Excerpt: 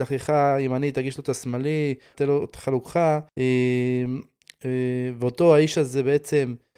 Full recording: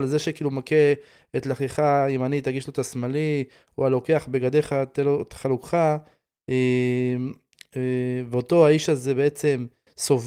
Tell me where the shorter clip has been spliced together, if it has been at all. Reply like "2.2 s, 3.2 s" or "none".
2.1 s, 3.3 s